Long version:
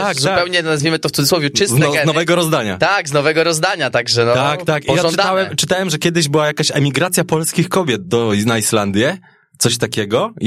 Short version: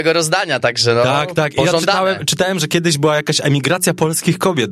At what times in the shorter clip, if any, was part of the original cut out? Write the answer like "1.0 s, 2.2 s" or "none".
none